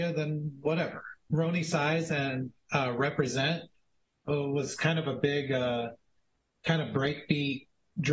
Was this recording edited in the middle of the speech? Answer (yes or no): yes